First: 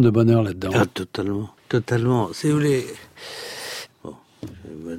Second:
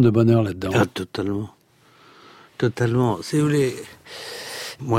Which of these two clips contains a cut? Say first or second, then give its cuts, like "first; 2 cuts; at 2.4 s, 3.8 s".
first; 2 cuts; at 1.6 s, 3.9 s